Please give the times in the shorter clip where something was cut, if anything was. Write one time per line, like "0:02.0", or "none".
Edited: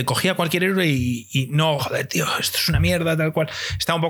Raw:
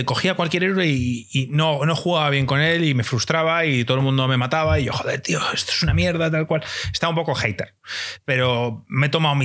0:01.8